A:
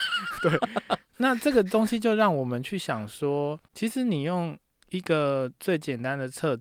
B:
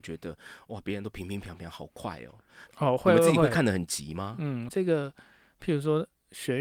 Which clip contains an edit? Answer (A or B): B